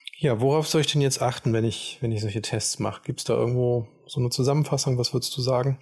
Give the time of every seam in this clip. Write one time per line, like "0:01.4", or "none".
none